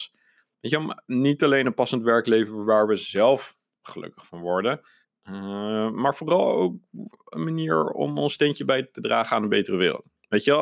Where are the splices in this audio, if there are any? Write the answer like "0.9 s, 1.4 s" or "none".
none